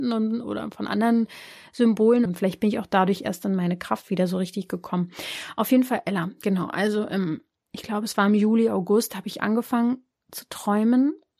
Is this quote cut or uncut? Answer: cut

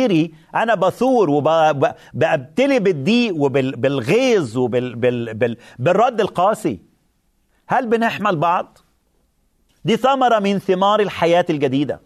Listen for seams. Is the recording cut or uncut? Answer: cut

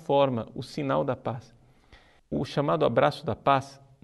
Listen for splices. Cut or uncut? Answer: cut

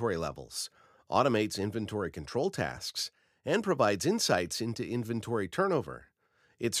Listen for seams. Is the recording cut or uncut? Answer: uncut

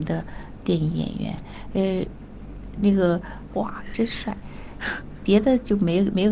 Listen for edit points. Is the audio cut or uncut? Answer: cut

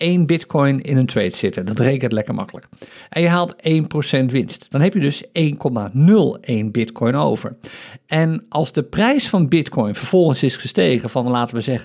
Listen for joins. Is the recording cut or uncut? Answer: uncut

